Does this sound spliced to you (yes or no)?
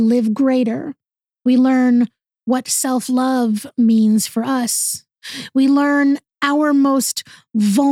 no